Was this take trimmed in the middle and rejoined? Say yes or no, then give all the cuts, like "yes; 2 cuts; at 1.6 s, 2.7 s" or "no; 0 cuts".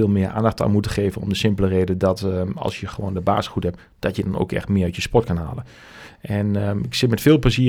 no; 0 cuts